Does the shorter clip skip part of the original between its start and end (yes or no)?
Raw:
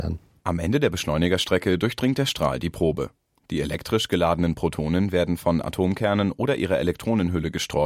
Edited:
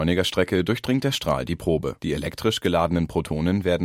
yes